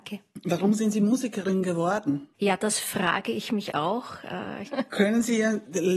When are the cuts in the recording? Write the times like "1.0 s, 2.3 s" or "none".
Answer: 2.3 s, 4.6 s